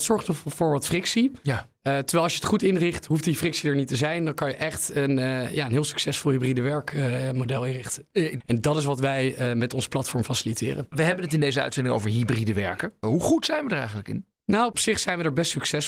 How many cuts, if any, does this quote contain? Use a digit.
1